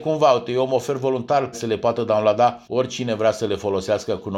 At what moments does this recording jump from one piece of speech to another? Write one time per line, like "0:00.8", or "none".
0:01.5
0:02.6